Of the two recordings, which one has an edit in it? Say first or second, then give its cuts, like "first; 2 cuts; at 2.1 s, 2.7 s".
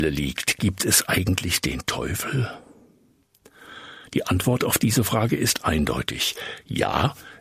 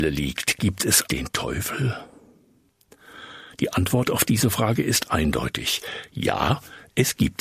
second; 1 cut; at 1.1 s